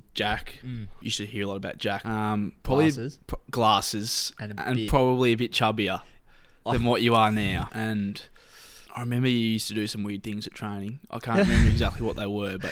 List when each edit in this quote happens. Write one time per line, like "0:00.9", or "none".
0:02.0
0:07.7
0:08.9